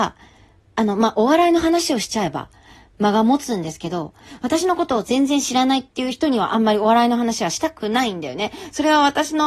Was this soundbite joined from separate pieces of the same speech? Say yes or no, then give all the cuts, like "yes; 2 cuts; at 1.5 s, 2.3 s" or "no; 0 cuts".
no; 0 cuts